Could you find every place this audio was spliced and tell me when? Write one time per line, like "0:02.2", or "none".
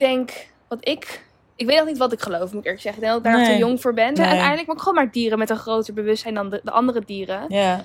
0:04.2